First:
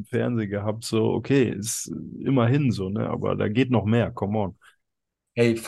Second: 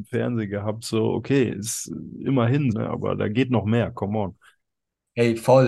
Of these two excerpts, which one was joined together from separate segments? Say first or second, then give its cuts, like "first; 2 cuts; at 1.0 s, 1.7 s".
second; 1 cut; at 2.7 s